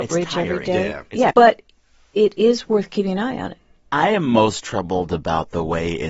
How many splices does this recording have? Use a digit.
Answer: 1